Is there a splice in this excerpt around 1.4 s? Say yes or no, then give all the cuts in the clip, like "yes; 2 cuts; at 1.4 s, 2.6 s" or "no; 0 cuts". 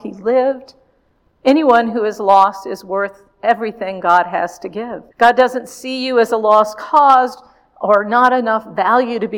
yes; 2 cuts; at 1.4 s, 5.1 s